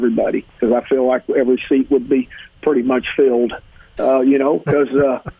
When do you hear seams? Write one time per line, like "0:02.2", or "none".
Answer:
0:04.0